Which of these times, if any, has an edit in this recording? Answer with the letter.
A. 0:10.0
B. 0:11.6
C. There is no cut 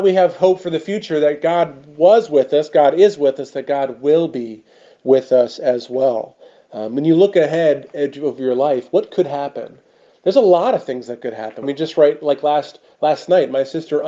B